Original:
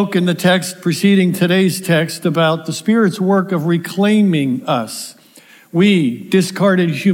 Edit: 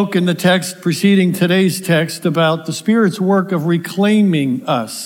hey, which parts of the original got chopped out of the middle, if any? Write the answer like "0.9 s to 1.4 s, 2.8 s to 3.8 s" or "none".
none